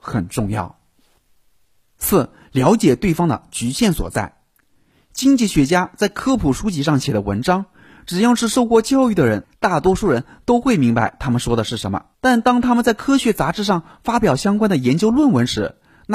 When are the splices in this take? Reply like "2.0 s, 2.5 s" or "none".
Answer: 12.1 s